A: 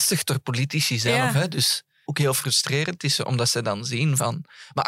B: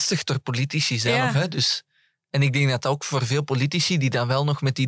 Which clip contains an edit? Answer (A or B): A